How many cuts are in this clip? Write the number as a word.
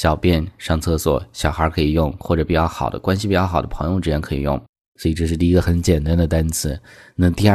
one